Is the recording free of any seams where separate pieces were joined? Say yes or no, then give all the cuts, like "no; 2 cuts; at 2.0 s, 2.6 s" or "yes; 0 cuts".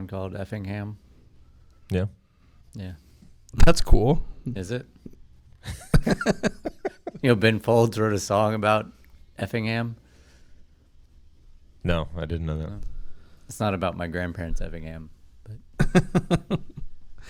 yes; 0 cuts